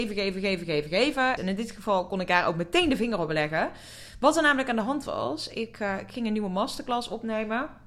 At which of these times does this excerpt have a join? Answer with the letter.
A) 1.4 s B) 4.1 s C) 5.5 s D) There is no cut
A